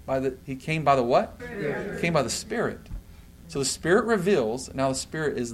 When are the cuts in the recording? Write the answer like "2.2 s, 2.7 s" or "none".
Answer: 1.4 s